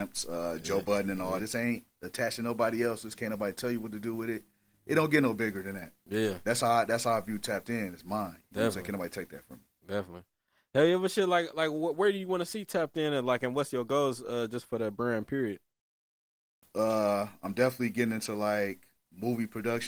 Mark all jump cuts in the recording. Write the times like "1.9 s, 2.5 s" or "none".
1.4 s